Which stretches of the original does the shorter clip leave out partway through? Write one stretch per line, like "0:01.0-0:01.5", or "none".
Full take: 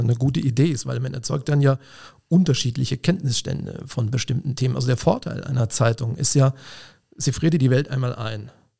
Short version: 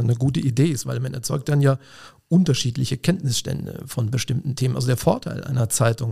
none